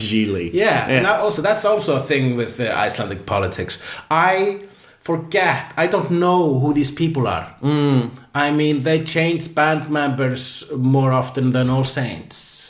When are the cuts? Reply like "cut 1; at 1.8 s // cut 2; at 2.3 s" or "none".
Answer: none